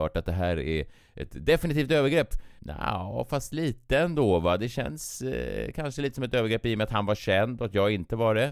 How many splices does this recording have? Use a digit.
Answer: 1